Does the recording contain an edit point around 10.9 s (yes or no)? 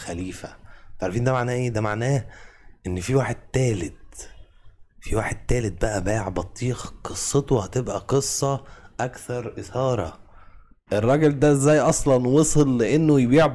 yes